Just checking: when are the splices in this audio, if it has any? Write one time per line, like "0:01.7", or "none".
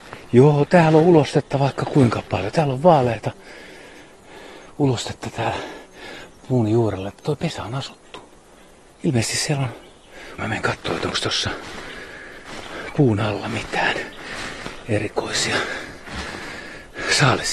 0:10.4